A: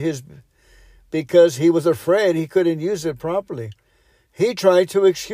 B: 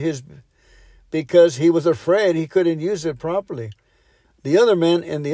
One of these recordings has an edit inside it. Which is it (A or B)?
B